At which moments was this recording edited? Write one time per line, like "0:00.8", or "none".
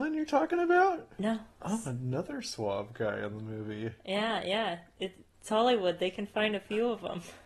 0:01.6